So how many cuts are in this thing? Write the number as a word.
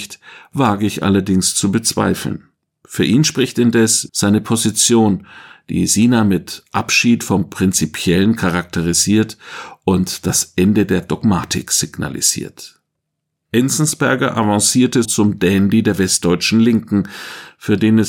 three